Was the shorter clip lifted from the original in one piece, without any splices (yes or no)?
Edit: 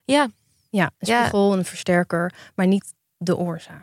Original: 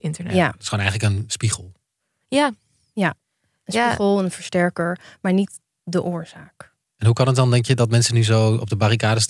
no